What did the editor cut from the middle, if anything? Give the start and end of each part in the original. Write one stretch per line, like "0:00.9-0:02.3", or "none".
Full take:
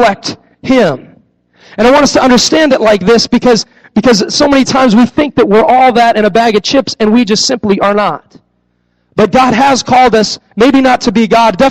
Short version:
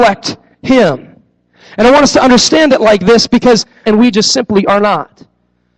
0:03.8-0:07.0